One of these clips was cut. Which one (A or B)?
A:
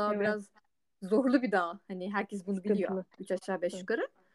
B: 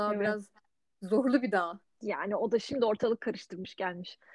B